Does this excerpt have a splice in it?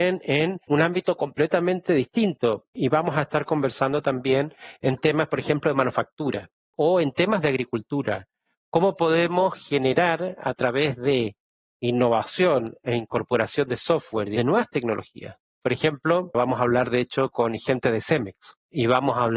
yes; 1 cut; at 16.3 s

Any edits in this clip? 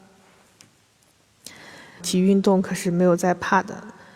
yes; 1 cut; at 2.0 s

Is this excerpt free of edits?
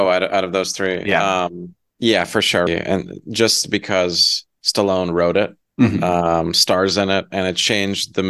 no; 1 cut; at 2.7 s

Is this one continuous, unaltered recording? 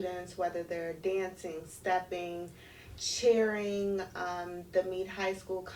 yes; 0 cuts

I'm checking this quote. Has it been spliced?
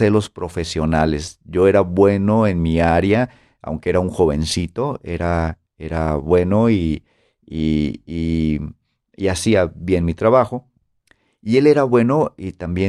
no; 0 cuts

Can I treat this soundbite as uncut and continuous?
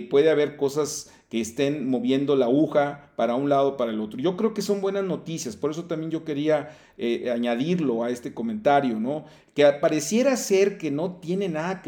yes; 0 cuts

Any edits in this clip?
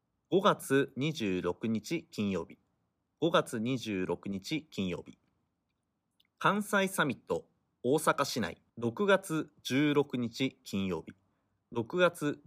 yes; 1 cut; at 8.7 s

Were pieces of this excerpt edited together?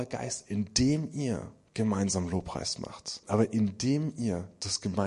yes; 1 cut; at 3.2 s

